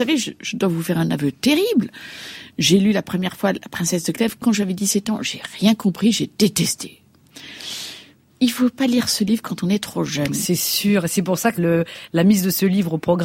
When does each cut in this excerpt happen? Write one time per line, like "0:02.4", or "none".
0:11.6